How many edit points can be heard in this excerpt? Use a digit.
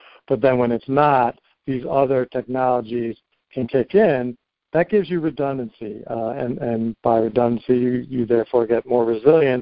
0